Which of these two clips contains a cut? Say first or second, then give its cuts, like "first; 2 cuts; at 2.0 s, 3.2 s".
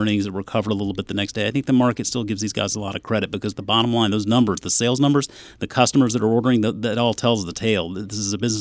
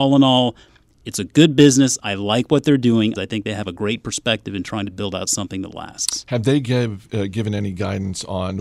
second; 1 cut; at 3.1 s